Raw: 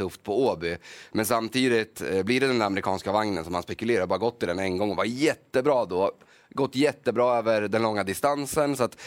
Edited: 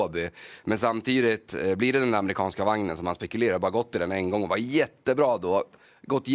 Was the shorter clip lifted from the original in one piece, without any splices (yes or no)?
yes